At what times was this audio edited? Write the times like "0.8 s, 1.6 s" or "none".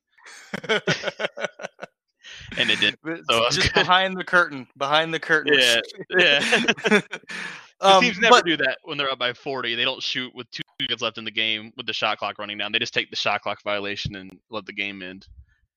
none